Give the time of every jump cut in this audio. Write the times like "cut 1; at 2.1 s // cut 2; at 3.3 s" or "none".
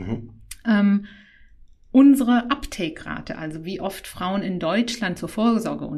none

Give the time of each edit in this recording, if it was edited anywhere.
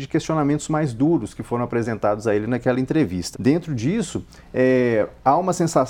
cut 1; at 3.3 s

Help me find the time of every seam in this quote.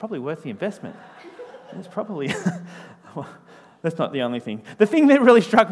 none

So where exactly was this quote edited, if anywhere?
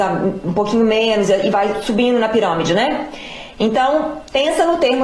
cut 1; at 3.5 s

